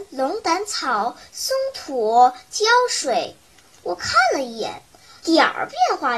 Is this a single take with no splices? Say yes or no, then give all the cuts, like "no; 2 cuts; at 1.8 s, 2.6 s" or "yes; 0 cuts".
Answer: no; 1 cut; at 5.2 s